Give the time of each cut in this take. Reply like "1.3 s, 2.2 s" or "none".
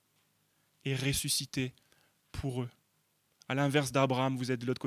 none